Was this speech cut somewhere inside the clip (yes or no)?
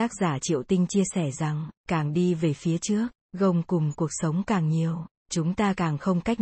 yes